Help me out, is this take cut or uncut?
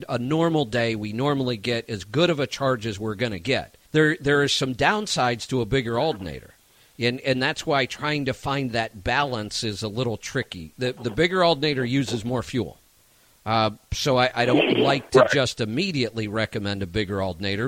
cut